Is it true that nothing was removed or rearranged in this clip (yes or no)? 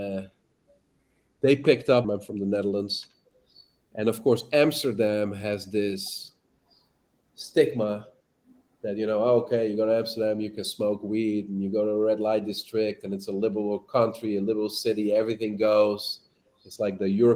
no